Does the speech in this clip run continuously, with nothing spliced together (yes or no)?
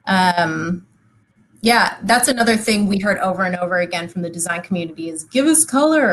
yes